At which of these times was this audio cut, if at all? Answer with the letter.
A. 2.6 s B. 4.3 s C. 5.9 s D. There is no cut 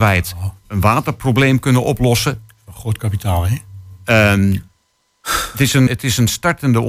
C